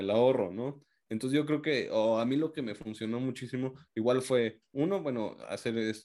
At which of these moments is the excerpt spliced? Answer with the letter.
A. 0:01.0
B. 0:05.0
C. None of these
C